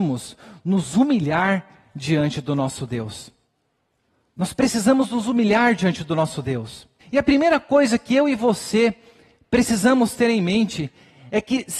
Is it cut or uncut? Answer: cut